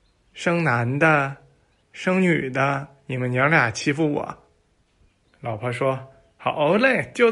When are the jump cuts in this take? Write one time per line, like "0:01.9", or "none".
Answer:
0:01.8